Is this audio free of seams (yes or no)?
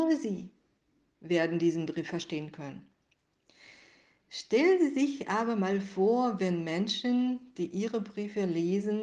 yes